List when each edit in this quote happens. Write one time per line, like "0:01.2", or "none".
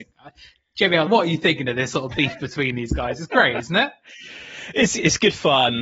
0:01.1